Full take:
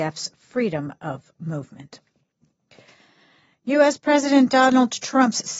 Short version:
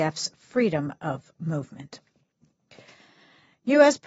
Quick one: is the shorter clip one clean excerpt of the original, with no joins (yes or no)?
yes